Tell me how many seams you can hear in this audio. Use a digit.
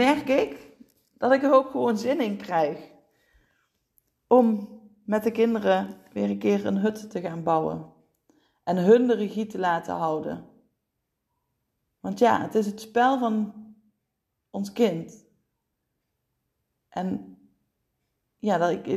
0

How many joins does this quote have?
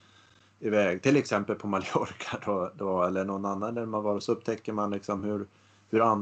0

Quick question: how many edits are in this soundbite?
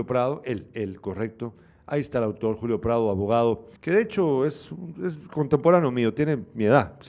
1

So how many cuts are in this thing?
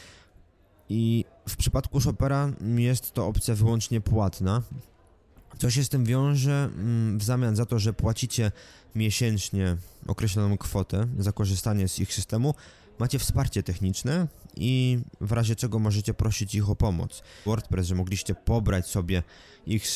1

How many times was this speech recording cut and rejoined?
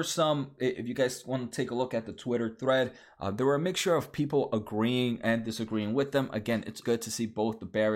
1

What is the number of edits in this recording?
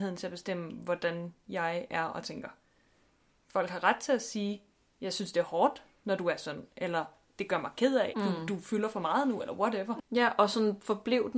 2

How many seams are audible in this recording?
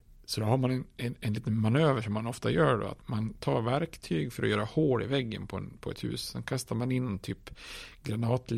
1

